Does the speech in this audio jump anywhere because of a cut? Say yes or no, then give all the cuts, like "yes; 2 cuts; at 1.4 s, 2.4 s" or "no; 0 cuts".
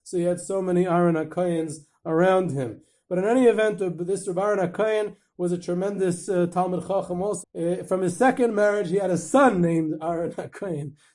yes; 1 cut; at 7.4 s